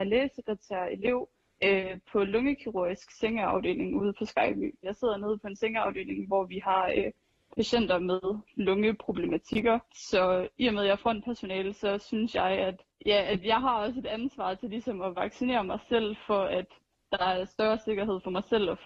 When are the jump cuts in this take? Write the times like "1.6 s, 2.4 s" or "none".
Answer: 4.8 s